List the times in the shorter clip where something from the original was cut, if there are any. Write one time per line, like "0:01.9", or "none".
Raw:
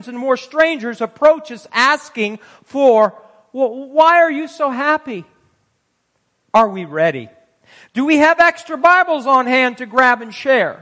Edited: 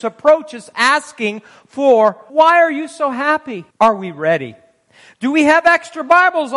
0:02.3
0:03.7